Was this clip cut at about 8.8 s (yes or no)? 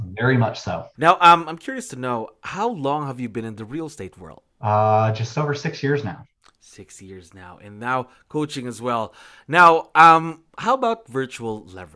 no